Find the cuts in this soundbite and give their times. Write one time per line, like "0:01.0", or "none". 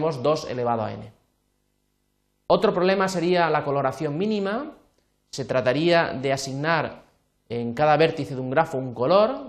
none